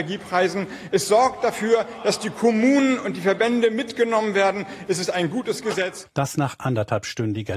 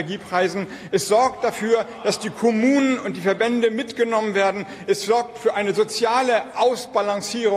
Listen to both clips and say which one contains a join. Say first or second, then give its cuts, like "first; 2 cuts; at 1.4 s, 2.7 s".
first; 1 cut; at 4.9 s